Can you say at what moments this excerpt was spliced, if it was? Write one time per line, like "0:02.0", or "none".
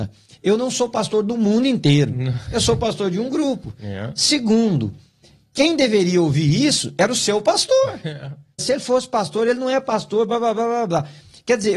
0:08.6